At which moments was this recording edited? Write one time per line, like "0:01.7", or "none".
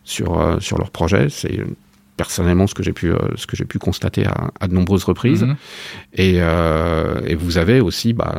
none